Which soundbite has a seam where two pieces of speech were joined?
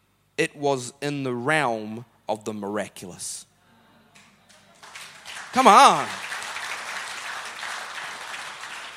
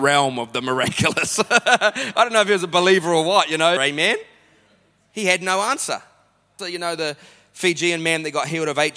second; 2 cuts; at 3.8 s, 6.6 s

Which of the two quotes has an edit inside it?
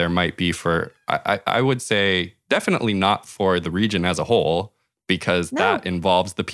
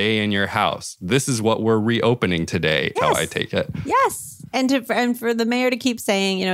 second; 2 cuts; at 3.0 s, 4.5 s

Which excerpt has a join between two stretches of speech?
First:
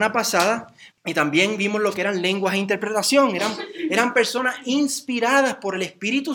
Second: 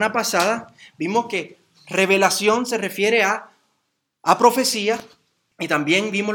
first; 1 cut; at 0.9 s

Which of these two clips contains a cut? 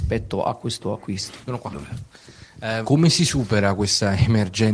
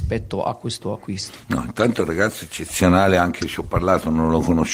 first; 2 cuts; at 1.5 s, 2.8 s

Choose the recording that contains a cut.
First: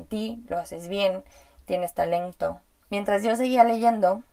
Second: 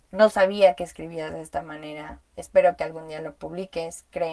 first; 1 cut; at 2.8 s

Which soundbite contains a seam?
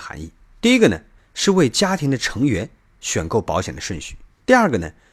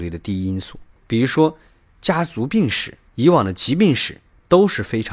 second; 1 cut; at 3.1 s

